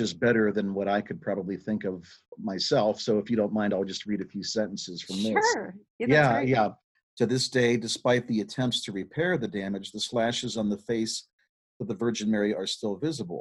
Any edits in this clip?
yes; 1 cut; at 7.0 s

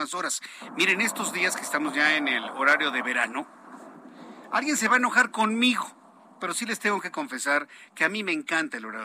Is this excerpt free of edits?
yes; 0 cuts

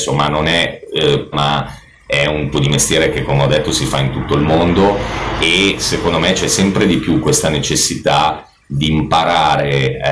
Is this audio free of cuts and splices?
no; 2 cuts; at 1.3 s, 2.5 s

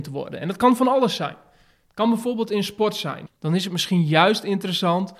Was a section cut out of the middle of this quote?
yes; 1 cut; at 3.3 s

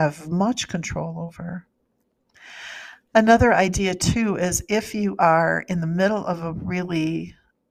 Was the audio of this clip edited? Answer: no; 0 cuts

